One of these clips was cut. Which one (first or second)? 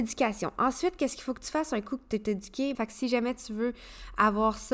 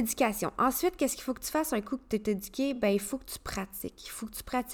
first